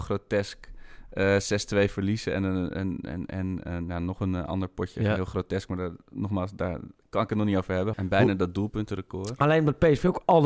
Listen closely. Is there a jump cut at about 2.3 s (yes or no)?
no